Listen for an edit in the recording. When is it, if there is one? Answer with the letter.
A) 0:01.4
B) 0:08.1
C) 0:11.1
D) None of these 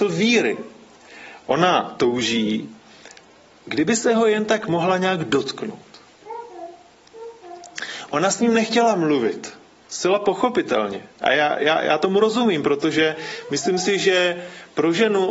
D